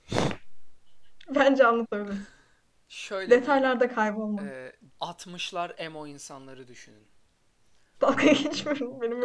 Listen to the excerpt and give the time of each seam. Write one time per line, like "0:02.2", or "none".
0:04.9
0:07.9